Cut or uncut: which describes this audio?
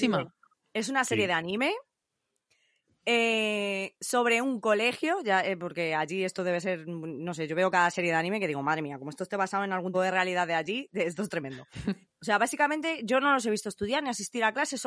cut